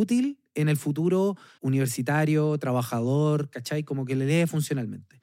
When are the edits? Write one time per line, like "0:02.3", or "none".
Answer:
0:01.6

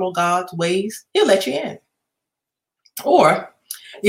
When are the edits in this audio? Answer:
0:01.1

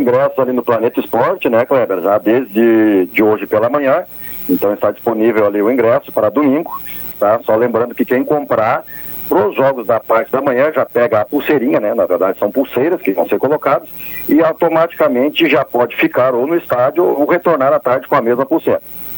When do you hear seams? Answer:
0:07.1

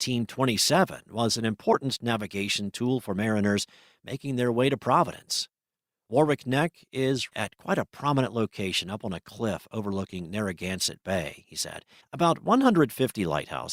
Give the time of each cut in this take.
0:07.3
0:12.0

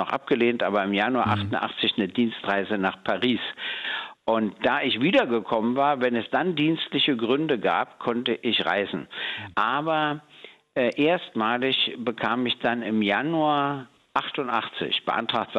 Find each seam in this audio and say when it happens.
0:09.5

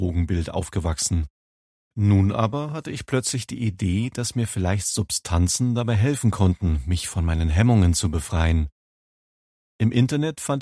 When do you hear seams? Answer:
none

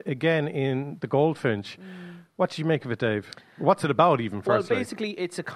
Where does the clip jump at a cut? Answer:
none

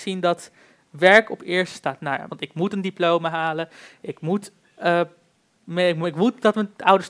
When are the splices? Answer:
0:02.3
0:04.6

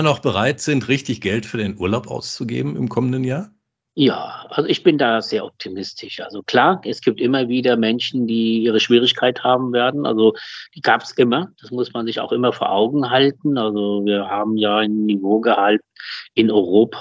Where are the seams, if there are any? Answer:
none

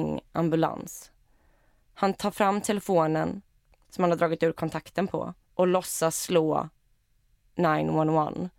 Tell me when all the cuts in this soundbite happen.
0:05.4

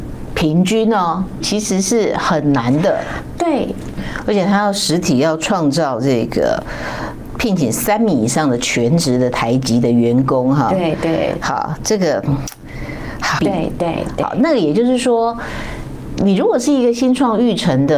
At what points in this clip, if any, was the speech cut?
0:01.4
0:13.4

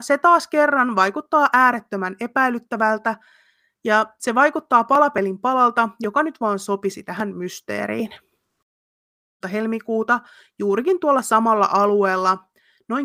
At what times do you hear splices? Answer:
0:09.4

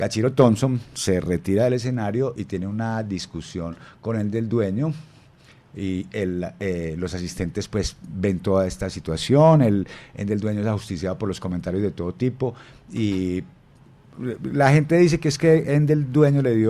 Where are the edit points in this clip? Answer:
none

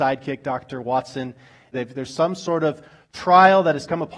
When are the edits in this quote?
0:01.7

